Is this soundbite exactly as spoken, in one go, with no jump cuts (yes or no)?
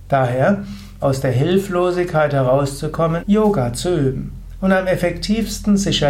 no